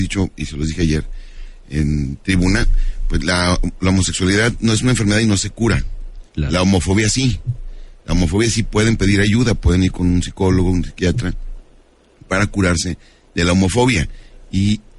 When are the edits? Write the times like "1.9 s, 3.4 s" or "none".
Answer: none